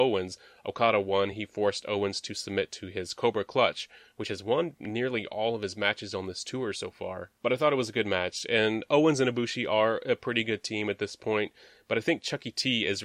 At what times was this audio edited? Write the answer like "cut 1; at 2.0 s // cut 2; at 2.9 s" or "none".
none